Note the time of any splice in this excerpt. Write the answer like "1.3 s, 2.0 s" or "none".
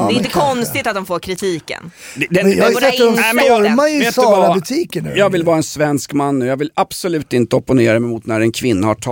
none